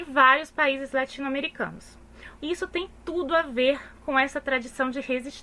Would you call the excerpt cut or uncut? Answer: cut